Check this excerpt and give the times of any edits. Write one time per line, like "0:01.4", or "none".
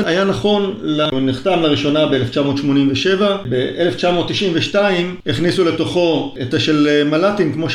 0:01.1